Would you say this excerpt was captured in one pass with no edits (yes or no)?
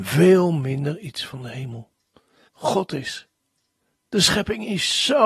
no